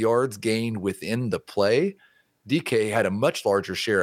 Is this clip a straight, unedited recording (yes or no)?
yes